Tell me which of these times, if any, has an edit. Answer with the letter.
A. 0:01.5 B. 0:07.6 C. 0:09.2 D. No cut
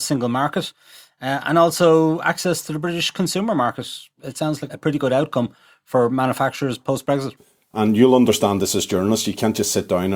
B